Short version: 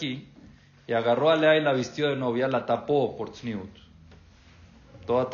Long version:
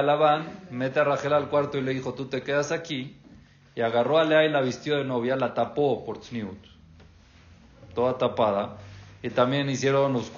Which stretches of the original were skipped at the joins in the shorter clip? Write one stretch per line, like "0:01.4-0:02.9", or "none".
none